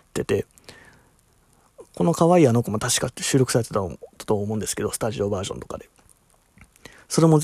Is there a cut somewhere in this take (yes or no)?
no